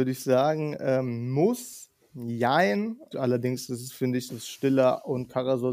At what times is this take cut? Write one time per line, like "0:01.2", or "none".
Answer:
0:03.1
0:04.3